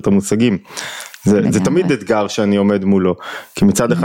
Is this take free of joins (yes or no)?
yes